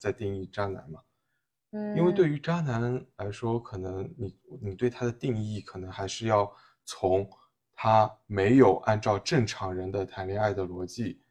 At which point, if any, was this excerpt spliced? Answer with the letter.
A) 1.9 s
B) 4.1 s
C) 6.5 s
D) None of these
D